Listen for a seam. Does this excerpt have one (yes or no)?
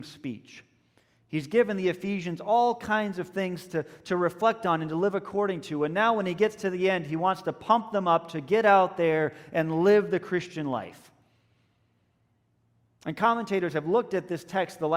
no